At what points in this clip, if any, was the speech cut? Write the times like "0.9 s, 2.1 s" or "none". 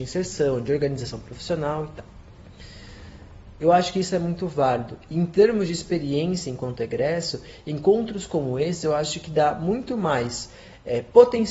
3.6 s